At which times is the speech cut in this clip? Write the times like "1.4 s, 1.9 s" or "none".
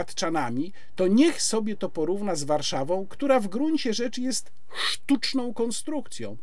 none